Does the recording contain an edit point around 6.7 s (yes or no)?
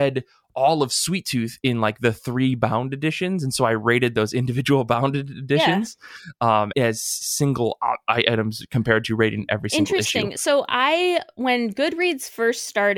yes